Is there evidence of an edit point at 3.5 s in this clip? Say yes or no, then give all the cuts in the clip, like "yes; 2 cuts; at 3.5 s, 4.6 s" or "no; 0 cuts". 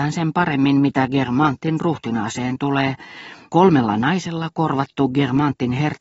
yes; 1 cut; at 3.5 s